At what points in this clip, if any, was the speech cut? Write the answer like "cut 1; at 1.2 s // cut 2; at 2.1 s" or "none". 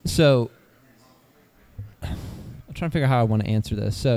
cut 1; at 1.9 s